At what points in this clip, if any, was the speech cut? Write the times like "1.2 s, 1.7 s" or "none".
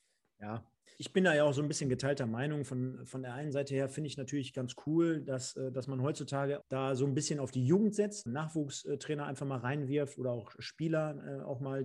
1.0 s, 6.6 s, 8.3 s